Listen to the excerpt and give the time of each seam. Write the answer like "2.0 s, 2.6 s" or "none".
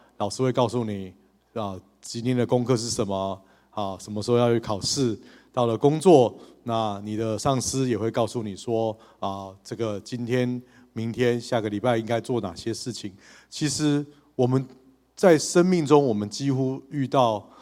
none